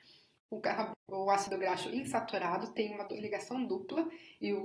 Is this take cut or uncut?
cut